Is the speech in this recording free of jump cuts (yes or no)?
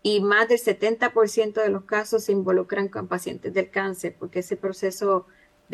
yes